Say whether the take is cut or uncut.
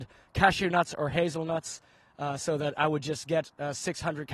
uncut